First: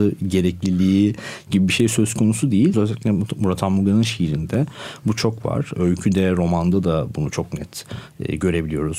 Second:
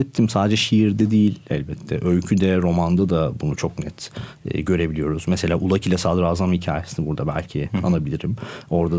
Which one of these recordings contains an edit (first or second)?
first